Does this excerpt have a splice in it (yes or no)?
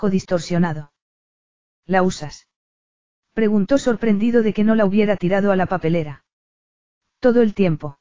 yes